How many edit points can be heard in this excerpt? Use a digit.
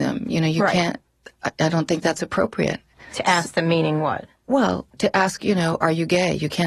0